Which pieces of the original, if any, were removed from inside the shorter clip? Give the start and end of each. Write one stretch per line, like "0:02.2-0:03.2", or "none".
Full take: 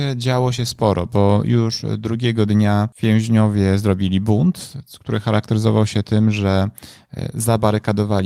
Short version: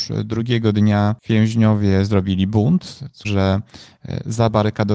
0:05.0-0:06.3

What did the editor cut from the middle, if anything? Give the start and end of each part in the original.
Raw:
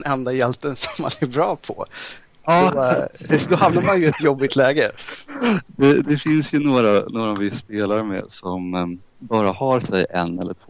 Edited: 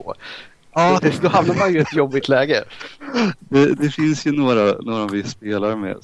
0:02.7-0:03.3

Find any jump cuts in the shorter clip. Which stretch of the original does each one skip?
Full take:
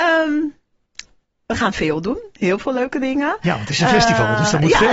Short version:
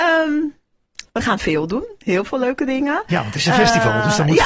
0:01.1-0:01.4

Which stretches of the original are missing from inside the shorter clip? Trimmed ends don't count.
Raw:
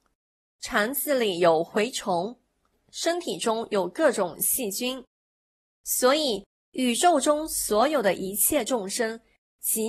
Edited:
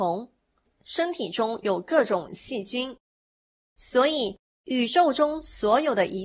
none

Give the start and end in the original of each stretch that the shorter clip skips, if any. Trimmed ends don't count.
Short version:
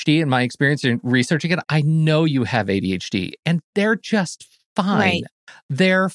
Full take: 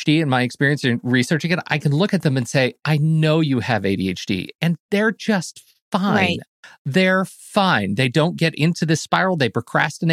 0:01.6-0:02.8

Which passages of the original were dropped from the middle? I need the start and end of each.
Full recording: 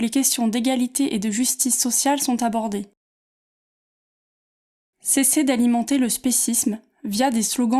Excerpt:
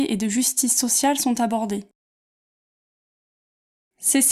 none

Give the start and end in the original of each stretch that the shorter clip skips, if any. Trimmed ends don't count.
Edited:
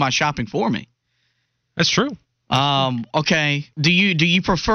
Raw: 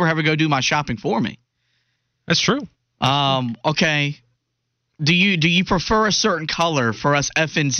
0:04.2-0:04.9

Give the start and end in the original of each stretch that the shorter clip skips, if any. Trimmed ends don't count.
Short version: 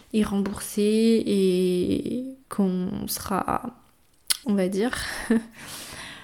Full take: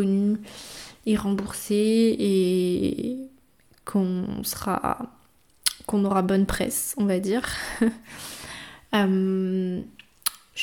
0:03.3-0:03.8
0:05.8-0:06.9

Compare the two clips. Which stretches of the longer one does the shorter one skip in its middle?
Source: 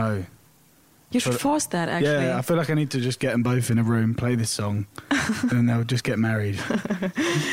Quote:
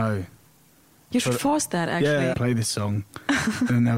0:02.3-0:04.1

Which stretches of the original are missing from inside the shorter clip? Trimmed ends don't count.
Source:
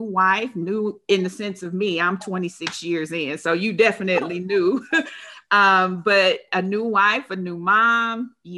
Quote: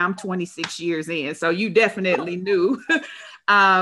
none

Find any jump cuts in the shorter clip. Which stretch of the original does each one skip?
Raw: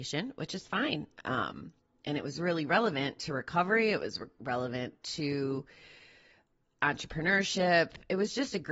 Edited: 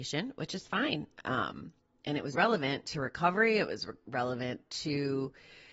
0:02.3-0:02.7

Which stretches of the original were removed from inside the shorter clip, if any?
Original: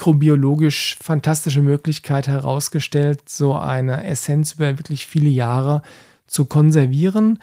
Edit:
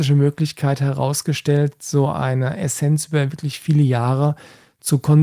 none

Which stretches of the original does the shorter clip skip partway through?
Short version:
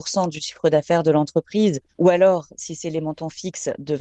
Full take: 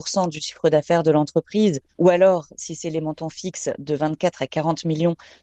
none

